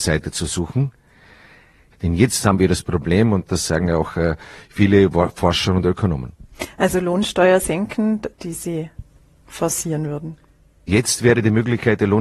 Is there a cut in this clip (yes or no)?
yes